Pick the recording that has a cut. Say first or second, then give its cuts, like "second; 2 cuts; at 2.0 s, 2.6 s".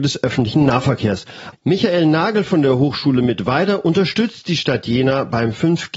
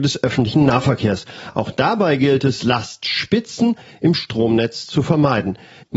first; 1 cut; at 1.5 s